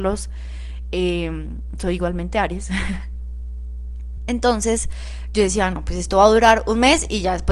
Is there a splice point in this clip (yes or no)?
no